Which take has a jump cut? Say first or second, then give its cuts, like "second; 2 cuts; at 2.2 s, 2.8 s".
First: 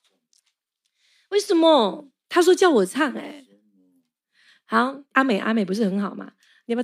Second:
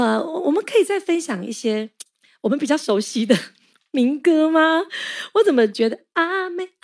first; 1 cut; at 5.1 s